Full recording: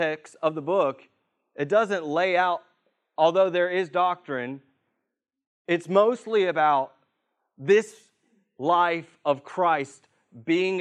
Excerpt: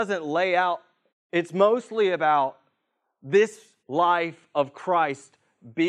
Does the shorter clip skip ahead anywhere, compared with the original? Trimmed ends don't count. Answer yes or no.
yes